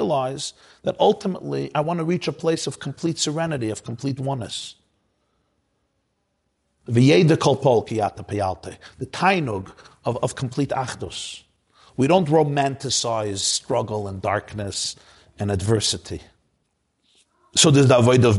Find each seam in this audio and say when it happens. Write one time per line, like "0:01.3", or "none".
none